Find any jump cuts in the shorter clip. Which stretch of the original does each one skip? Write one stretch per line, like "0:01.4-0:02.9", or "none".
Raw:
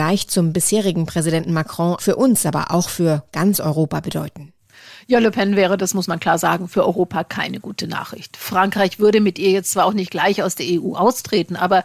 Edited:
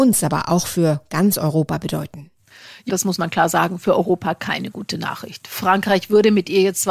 0:05.1-0:05.8